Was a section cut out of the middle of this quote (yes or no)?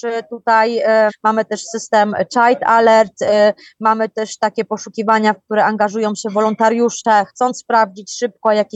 yes